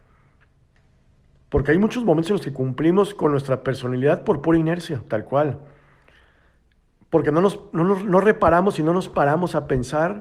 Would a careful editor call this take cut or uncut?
uncut